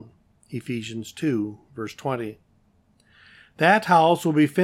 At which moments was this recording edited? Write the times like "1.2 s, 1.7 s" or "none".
none